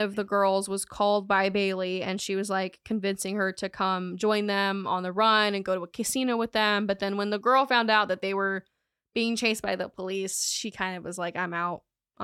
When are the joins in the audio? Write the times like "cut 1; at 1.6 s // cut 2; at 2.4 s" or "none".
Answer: none